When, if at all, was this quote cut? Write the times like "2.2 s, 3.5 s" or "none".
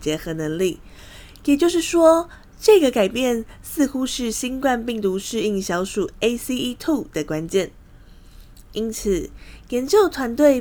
none